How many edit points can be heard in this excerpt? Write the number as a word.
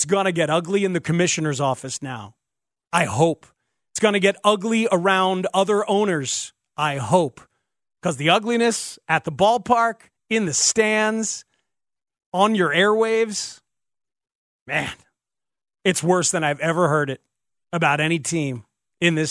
one